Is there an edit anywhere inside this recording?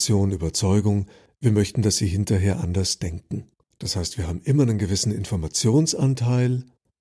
yes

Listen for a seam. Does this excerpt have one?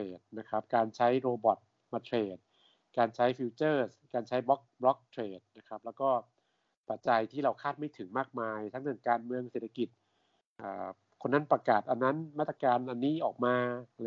yes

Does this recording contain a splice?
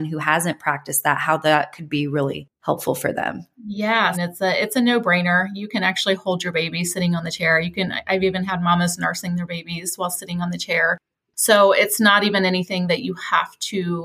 yes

